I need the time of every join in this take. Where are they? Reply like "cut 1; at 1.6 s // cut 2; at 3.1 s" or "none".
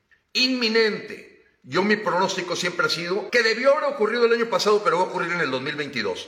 cut 1; at 3.3 s